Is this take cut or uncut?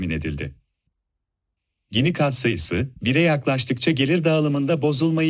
cut